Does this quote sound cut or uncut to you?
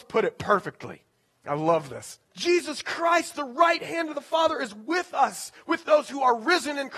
cut